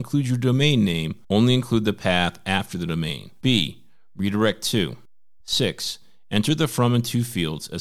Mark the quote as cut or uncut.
cut